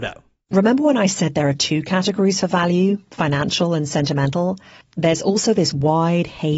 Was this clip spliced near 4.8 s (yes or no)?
yes